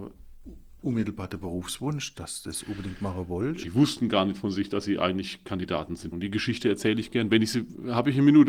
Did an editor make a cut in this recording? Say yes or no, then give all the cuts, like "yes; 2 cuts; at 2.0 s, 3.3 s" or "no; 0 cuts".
yes; 2 cuts; at 3.6 s, 6.1 s